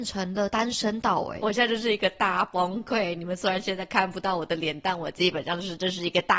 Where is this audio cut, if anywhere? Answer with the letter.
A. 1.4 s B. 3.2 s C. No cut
A